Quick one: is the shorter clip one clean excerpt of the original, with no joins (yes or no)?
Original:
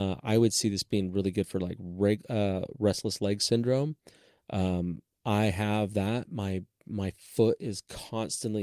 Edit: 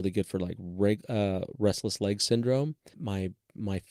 no